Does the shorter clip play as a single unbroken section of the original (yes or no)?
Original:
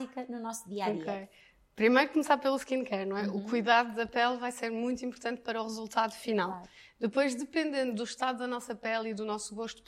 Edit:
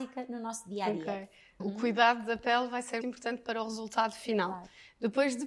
no